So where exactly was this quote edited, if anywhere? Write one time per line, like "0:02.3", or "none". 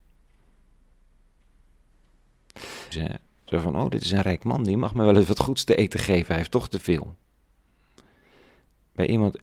0:02.9